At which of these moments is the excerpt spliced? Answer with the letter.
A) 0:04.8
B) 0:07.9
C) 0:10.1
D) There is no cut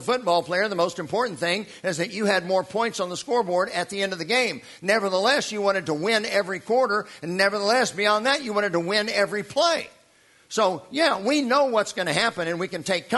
D